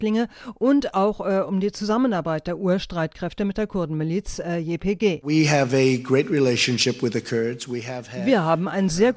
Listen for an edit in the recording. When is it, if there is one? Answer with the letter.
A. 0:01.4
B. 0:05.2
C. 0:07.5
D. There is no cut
D